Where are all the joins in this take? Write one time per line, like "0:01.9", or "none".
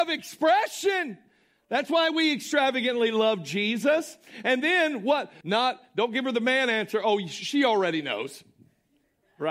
0:05.4

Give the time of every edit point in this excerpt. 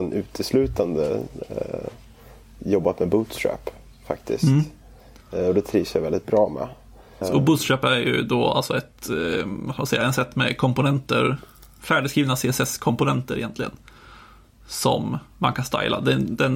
0:07.2

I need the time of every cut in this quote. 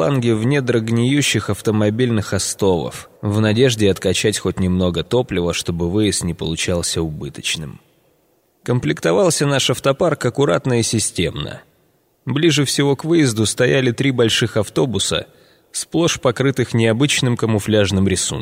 0:03.2

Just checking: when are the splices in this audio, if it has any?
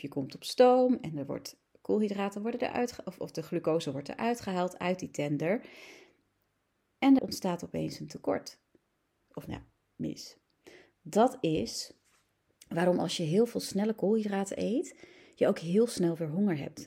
0:07.2
0:09.3

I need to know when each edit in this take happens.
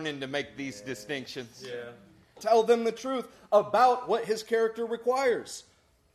0:02.4

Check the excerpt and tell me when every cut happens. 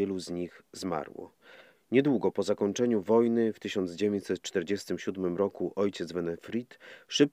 none

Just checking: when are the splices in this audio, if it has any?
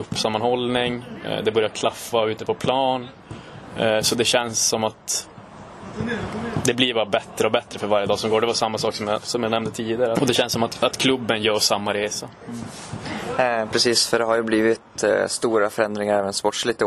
0:10.1

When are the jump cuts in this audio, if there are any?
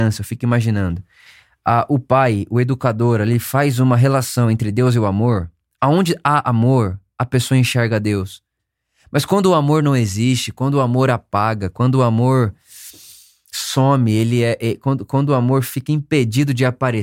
none

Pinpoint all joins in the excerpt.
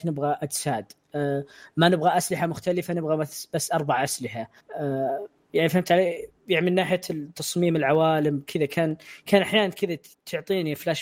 none

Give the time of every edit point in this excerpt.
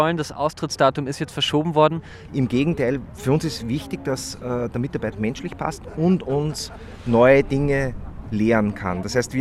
0:02.3
0:05.1

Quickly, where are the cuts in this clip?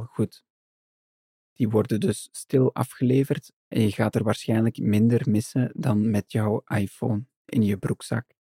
0:01.4

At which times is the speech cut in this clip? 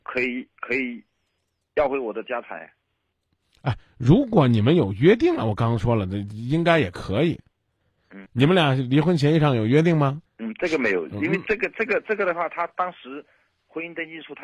0:08.3
0:10.3

